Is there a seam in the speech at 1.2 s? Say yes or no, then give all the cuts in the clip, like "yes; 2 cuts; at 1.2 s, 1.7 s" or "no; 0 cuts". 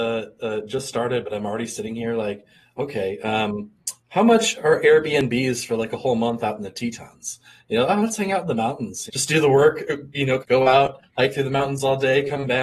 no; 3 cuts; at 4.0 s, 9.1 s, 10.4 s